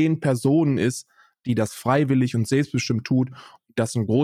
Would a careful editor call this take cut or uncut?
uncut